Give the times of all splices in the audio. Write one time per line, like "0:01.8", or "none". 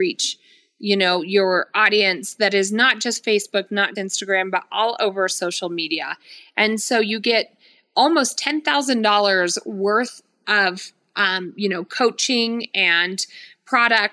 0:03.9

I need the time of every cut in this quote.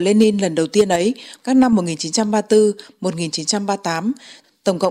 0:01.4

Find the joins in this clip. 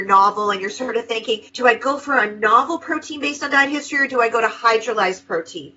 0:01.5

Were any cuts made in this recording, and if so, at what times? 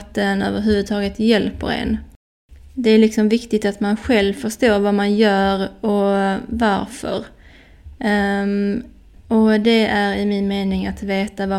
0:09.2

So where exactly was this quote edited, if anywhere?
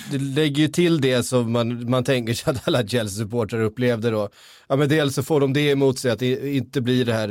0:05.2

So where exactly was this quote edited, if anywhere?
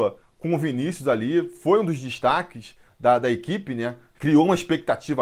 0:04.1

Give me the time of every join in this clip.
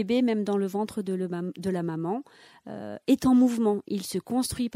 none

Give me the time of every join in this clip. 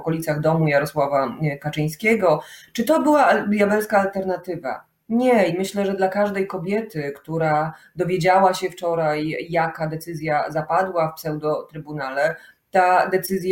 none

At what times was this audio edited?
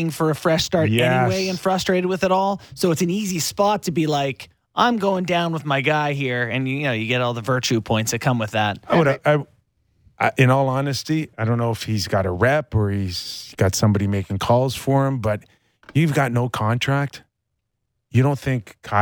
0:09.2
0:11.3

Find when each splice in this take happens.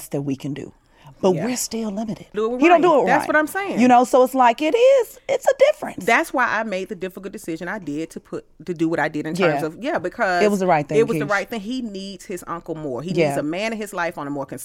0:02.3

